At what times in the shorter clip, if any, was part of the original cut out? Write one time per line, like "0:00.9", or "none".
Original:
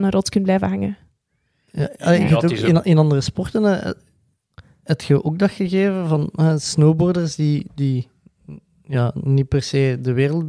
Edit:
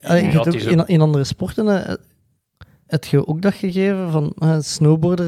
none